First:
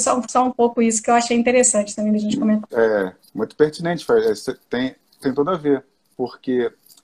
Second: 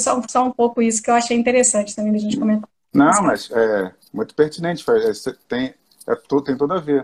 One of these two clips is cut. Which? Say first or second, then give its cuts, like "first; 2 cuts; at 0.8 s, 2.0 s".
first; 2 cuts; at 2.7 s, 5.2 s